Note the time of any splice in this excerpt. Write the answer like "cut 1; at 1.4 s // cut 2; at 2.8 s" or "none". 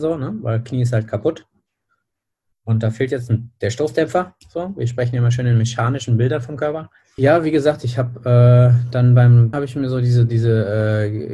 cut 1; at 7.2 s // cut 2; at 9.5 s